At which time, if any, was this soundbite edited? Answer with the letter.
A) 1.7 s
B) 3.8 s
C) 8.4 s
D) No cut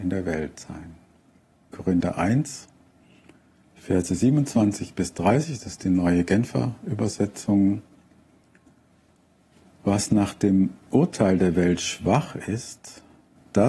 A